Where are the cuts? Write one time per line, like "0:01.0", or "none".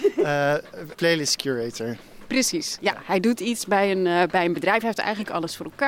0:00.9